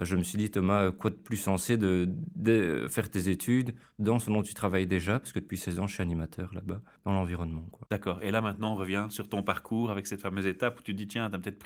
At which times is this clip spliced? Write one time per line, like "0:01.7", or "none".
none